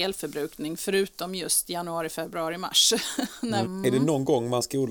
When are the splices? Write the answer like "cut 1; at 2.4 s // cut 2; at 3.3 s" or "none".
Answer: cut 1; at 3.6 s